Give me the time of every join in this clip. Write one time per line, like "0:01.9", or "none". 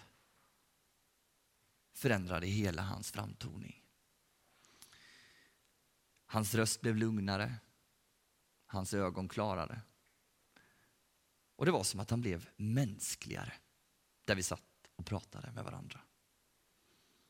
none

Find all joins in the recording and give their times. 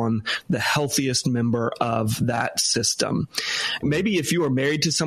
0:03.8

